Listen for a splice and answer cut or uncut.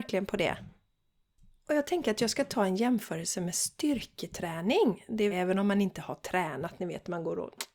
cut